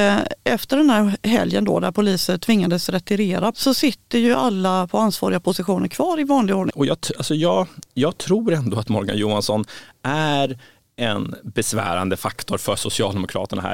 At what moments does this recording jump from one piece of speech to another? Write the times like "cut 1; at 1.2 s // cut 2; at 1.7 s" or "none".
cut 1; at 3.5 s // cut 2; at 6.7 s // cut 3; at 8.9 s